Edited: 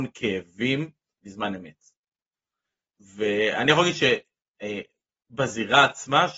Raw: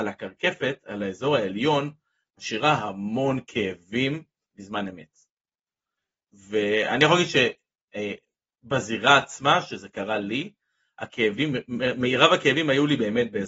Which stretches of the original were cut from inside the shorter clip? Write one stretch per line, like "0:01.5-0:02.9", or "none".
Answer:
none